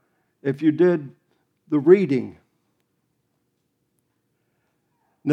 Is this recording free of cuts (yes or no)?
yes